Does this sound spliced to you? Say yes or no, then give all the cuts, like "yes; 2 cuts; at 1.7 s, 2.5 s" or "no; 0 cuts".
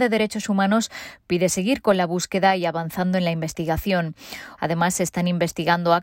yes; 1 cut; at 4.6 s